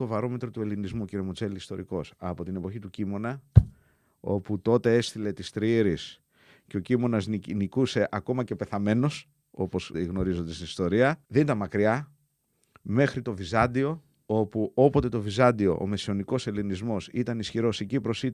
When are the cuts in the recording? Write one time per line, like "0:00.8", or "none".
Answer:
0:09.9
0:11.2